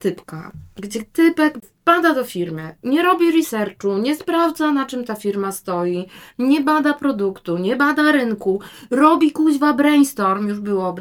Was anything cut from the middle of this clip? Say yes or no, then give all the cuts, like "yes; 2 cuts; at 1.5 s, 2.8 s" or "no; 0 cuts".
no; 0 cuts